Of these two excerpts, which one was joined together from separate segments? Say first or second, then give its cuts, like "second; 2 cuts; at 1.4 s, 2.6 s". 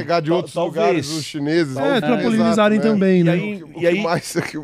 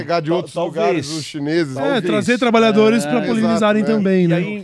first; 1 cut; at 2.0 s